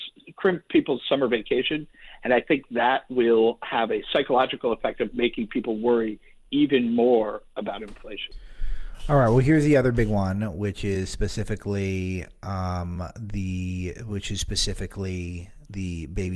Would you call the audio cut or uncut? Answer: uncut